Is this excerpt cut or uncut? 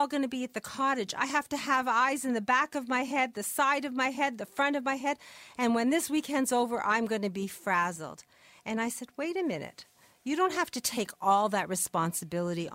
uncut